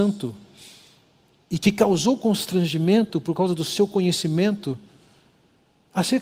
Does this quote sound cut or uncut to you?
uncut